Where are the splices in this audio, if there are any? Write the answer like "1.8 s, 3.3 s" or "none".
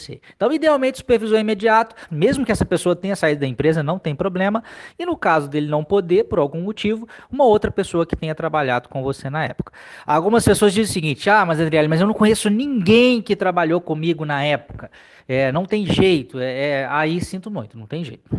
2.1 s